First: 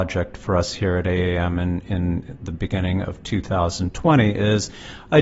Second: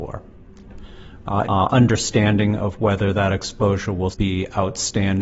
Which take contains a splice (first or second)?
second